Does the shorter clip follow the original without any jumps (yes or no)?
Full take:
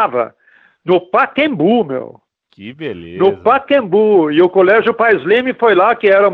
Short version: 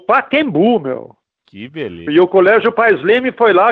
no